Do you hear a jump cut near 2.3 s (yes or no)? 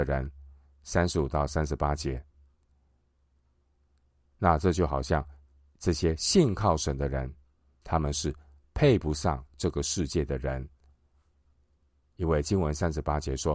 no